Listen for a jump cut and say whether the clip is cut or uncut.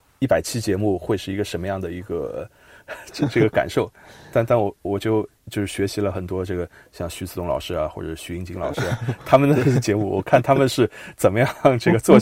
uncut